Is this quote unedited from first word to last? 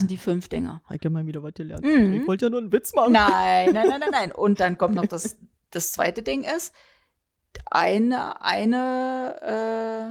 yes; 0 cuts

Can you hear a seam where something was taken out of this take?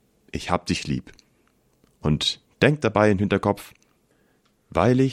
no; 0 cuts

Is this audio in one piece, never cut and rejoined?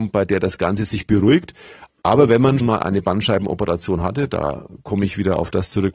no; 1 cut; at 2.6 s

